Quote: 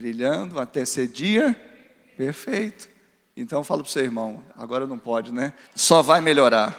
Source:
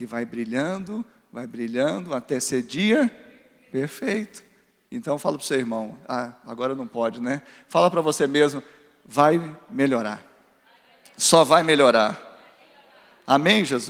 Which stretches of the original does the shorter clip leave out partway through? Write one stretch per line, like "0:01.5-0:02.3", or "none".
0:06.0-0:06.4
0:07.5-0:11.1